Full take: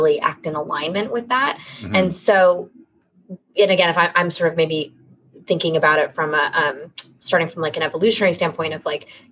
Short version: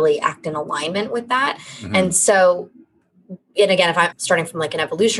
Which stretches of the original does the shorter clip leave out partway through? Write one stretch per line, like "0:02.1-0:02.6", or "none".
0:04.1-0:07.1